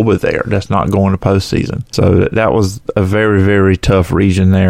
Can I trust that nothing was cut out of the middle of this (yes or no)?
yes